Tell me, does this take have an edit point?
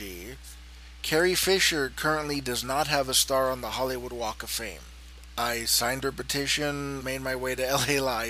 yes; 1 cut; at 7.0 s

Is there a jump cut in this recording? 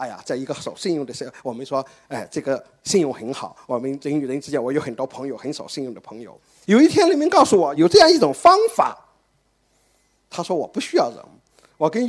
yes; 2 cuts; at 6.6 s, 7.8 s

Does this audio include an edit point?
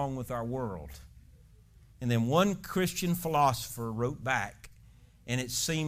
no; 0 cuts

